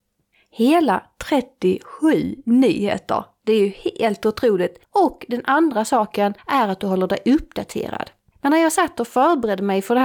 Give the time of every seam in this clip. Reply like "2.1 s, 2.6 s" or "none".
4.8 s, 8.3 s